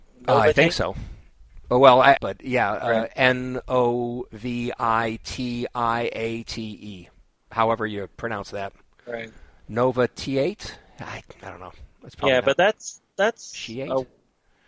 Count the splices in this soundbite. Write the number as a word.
one